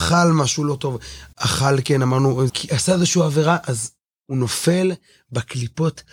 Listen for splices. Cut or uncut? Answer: cut